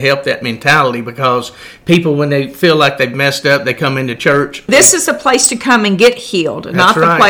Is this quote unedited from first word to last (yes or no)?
no